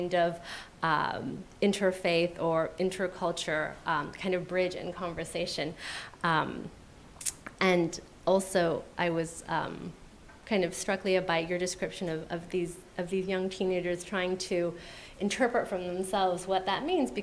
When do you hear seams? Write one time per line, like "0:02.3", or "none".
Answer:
none

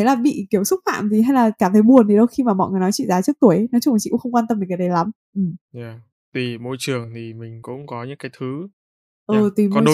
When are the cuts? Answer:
none

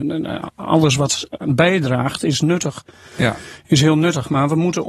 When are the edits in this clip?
none

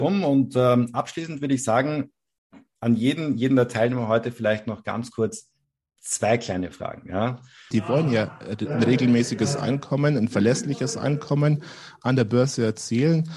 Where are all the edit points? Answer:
0:07.7

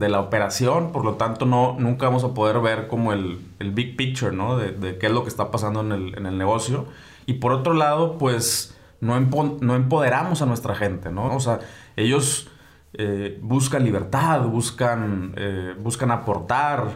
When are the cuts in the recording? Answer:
0:11.3

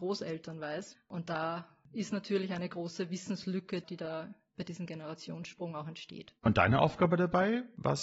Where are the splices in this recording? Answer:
0:06.4

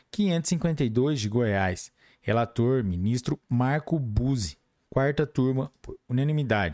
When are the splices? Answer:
none

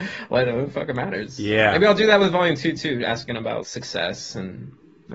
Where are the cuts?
0:03.6

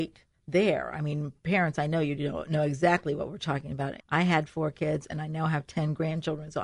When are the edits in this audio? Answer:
0:04.0

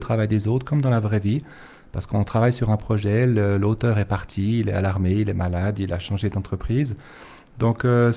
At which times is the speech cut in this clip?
none

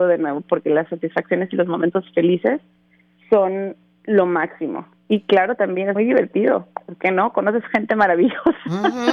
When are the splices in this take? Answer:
0:06.0

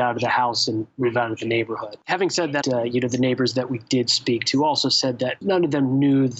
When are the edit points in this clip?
0:02.6

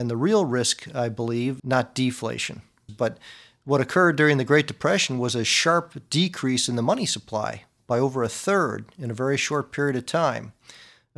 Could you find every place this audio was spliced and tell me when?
0:01.6
0:02.9

